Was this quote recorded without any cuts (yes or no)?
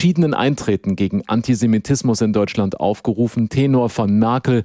yes